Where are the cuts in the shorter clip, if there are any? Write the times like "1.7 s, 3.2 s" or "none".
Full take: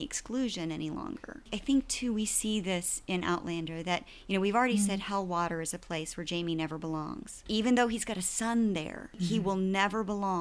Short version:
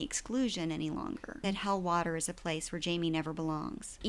1.4 s

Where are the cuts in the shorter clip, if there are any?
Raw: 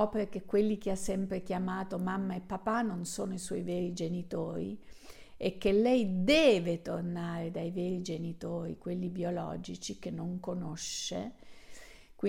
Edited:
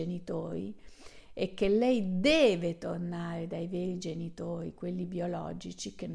none

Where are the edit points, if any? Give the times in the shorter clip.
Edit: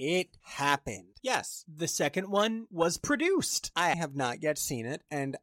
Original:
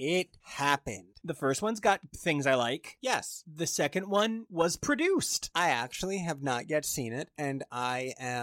1.2 s, 3.9 s

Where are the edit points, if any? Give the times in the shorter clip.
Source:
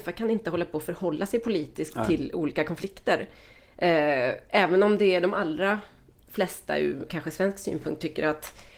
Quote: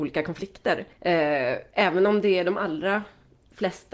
0.9 s

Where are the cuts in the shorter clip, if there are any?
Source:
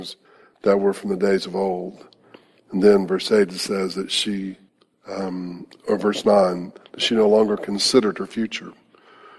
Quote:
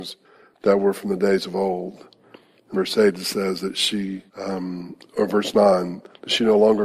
2.7 s, 4.3 s

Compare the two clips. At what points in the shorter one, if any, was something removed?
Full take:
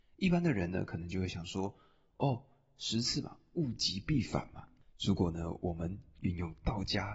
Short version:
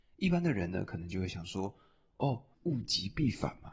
2.5 s

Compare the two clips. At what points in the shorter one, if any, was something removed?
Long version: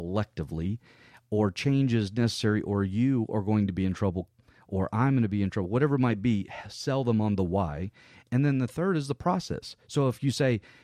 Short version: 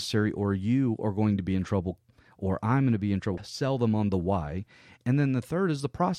3.4 s

